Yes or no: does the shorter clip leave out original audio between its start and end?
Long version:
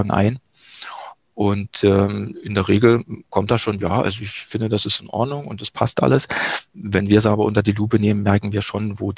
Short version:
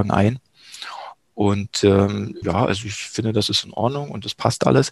yes